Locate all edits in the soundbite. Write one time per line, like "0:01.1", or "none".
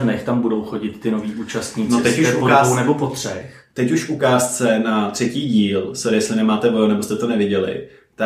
none